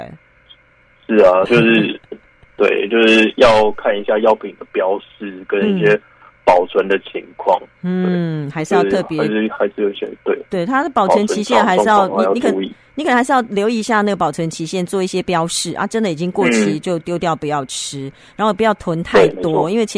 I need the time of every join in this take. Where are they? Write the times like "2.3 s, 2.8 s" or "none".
1.5 s